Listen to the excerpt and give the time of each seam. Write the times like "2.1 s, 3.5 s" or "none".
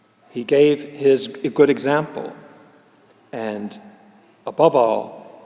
none